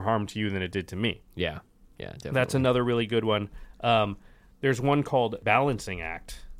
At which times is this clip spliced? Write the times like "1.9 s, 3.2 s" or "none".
none